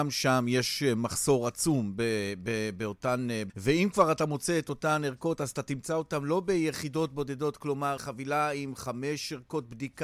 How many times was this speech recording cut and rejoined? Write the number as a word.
two